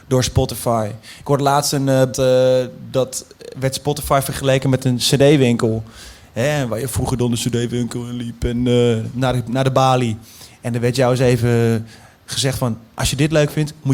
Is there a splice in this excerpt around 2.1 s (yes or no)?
yes